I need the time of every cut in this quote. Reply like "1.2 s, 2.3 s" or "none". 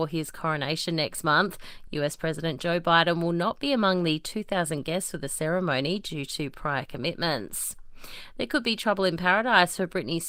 none